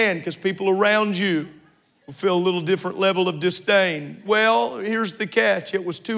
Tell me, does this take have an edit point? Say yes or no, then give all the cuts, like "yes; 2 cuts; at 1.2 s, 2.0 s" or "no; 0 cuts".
yes; 1 cut; at 4.2 s